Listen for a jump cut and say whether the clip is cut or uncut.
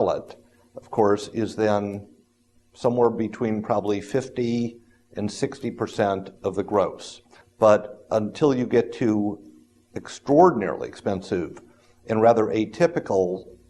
cut